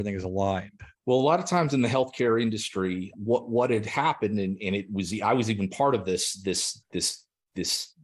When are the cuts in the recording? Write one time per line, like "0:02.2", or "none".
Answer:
0:00.9
0:03.1